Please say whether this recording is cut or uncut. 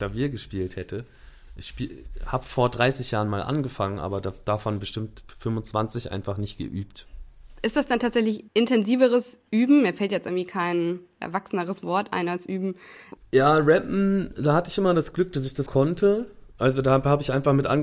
cut